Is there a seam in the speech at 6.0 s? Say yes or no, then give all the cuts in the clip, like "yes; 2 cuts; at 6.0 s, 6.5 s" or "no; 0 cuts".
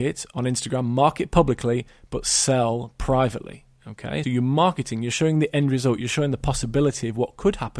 no; 1 cut; at 4.2 s